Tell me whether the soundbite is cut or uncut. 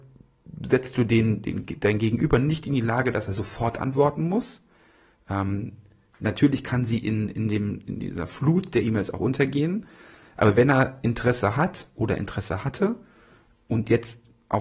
uncut